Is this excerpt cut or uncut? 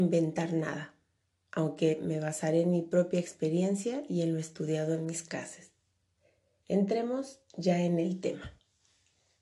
uncut